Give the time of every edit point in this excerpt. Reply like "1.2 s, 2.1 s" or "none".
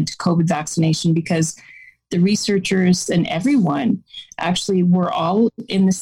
3.1 s